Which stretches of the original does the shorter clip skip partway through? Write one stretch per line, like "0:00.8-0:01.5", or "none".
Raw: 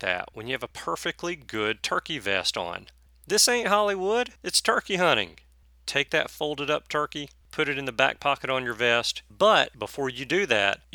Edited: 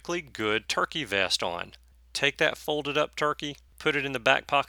0:03.1-0:05.7